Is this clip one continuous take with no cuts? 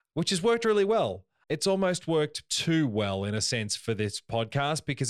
no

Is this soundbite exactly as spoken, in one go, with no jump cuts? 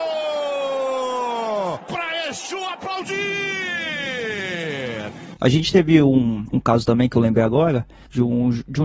yes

